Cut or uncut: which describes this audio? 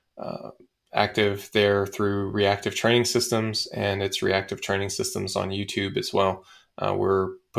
uncut